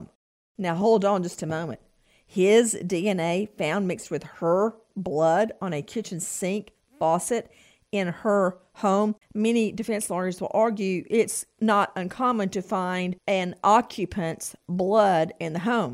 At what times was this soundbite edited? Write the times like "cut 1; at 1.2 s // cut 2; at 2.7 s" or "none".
cut 1; at 9.2 s // cut 2; at 13.2 s